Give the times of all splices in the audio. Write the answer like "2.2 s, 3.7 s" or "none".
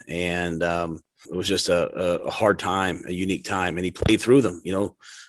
1.2 s